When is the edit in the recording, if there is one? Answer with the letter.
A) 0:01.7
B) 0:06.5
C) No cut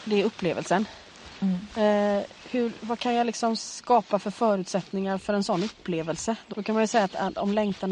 B